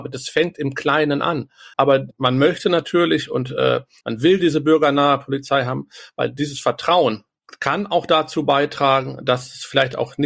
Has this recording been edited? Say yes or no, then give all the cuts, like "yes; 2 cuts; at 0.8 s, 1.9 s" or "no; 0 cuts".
yes; 2 cuts; at 1.7 s, 4.0 s